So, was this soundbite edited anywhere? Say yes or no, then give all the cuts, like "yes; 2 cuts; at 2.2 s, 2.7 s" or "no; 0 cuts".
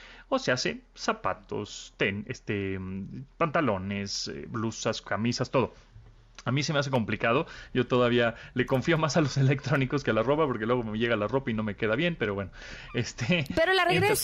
no; 0 cuts